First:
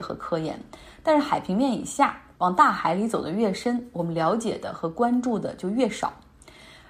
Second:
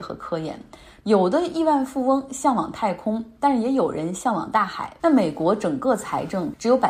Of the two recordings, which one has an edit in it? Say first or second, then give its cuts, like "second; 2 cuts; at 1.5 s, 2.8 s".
second; 2 cuts; at 1.0 s, 5.0 s